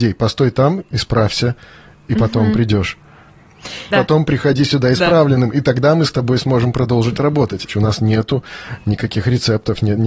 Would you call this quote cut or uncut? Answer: cut